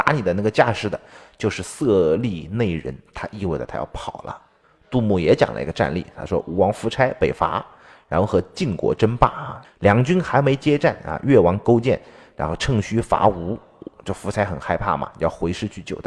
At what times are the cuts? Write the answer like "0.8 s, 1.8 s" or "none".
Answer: 9.6 s